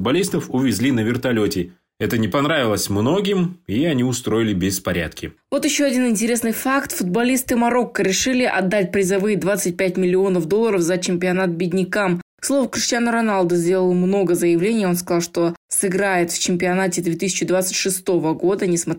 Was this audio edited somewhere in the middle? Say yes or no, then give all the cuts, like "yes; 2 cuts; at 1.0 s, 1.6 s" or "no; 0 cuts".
no; 0 cuts